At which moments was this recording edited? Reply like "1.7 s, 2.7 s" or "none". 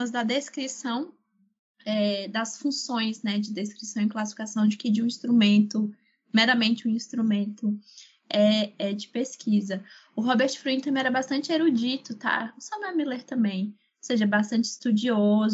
none